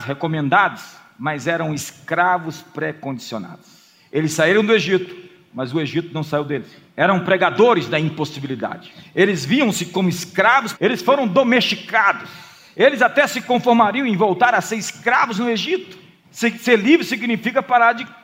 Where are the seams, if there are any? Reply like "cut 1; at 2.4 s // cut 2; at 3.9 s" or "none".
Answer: cut 1; at 10.7 s // cut 2; at 16.2 s